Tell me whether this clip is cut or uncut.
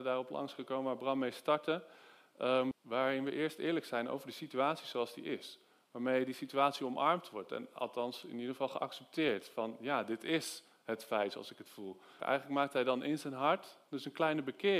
cut